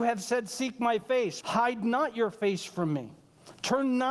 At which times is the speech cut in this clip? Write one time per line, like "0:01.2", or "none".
0:01.4